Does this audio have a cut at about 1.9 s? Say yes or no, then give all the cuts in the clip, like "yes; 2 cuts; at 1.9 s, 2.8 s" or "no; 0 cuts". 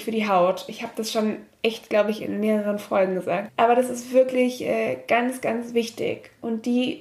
no; 1 cut; at 3.5 s